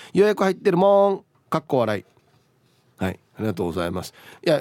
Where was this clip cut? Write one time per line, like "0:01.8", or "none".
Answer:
none